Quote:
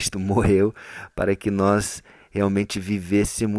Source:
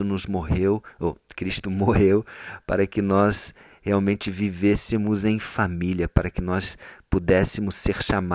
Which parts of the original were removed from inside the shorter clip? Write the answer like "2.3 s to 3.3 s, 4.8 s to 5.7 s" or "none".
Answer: none